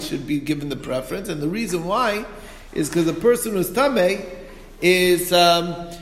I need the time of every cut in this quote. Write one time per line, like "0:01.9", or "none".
none